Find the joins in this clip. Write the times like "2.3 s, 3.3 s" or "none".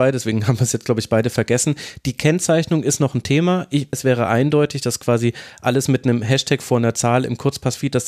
3.9 s